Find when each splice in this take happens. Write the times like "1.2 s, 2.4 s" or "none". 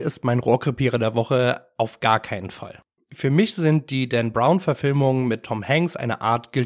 3.0 s